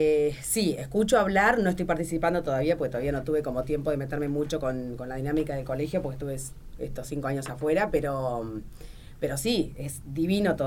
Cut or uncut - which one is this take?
uncut